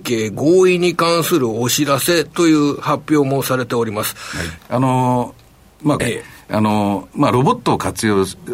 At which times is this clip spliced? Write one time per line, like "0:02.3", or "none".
0:04.6
0:06.0